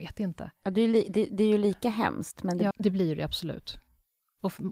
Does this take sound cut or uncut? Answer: cut